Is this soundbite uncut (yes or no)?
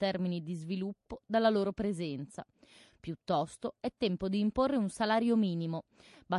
yes